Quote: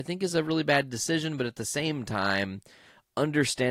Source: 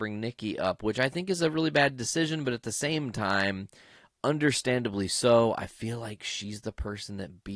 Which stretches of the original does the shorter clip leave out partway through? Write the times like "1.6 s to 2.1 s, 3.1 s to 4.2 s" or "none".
none

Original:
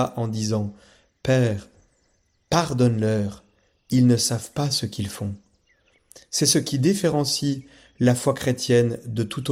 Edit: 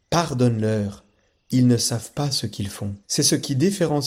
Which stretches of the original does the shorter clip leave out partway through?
5.4 s to 6.3 s

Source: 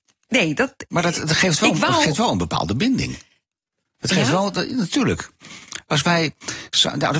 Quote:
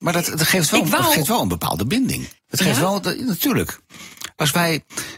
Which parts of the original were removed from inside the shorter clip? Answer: 3.3 s to 3.9 s

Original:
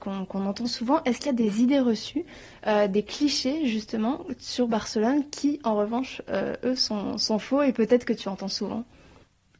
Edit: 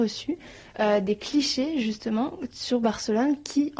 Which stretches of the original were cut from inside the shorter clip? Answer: none

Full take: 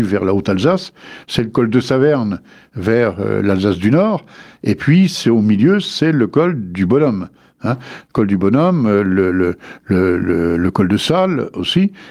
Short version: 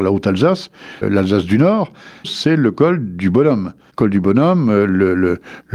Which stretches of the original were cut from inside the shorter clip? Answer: 1.2 s to 3.3 s, 4.6 s to 5.8 s, 7.5 s to 8.1 s

